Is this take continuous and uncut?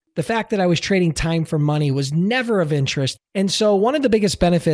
no; 1 cut; at 3.2 s

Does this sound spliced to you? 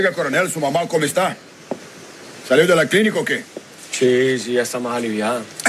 no; 0 cuts

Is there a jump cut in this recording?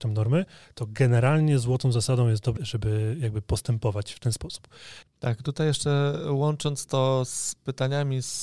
yes; 2 cuts; at 2.6 s, 5.0 s

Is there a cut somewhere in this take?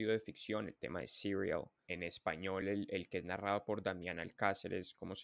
no; 0 cuts

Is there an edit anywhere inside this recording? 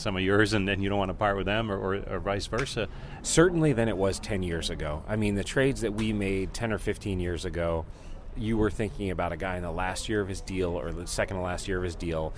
yes; 1 cut; at 3.2 s

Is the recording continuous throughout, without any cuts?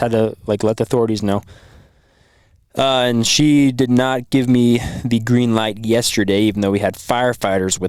yes; 0 cuts

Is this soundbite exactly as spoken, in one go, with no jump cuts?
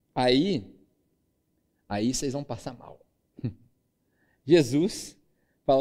yes; 0 cuts

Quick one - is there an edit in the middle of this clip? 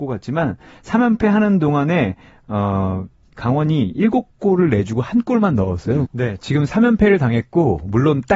yes; 1 cut; at 6.0 s

